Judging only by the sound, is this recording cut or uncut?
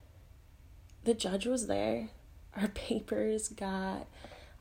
cut